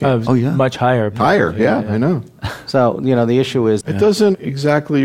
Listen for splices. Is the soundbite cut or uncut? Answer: cut